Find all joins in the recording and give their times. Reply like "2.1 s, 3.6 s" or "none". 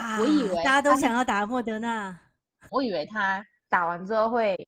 2.7 s